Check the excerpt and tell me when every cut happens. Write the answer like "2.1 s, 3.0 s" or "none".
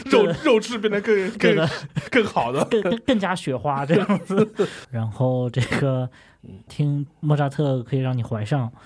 4.8 s, 6.7 s